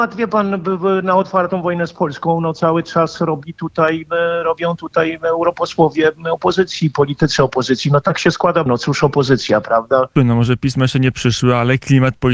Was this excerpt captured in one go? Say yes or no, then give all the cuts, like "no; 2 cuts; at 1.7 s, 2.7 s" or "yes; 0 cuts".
no; 3 cuts; at 4.1 s, 8.7 s, 10.2 s